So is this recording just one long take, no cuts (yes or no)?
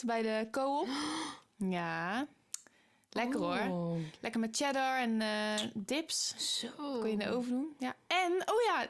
yes